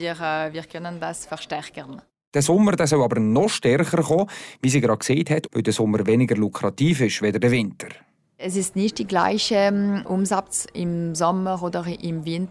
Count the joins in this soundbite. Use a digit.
1